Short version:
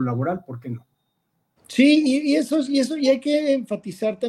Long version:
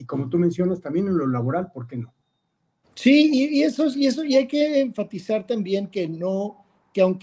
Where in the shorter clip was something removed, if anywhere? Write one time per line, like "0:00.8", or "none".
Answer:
none